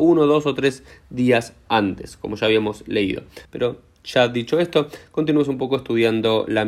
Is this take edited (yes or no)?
yes